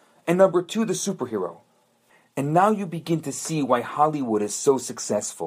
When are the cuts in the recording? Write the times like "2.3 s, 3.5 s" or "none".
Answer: none